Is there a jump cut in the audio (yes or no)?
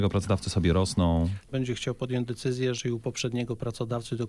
yes